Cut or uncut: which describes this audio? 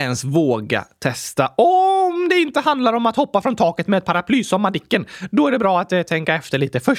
uncut